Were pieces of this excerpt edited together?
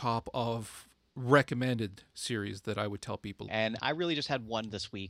yes; 1 cut; at 3.5 s

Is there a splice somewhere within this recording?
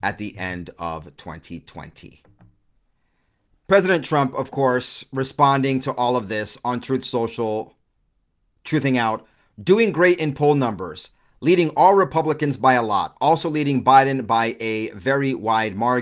yes; 1 cut; at 3.5 s

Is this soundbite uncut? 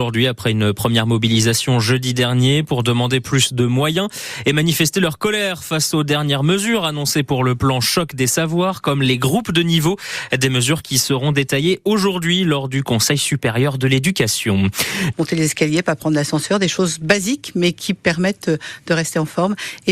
no; 1 cut; at 15.1 s

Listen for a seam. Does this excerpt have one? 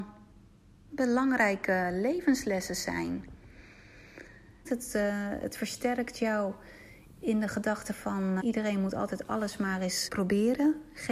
yes; 3 cuts; at 4.6 s, 8.4 s, 10.1 s

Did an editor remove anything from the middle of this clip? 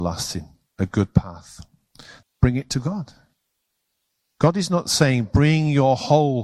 yes; 1 cut; at 2.2 s

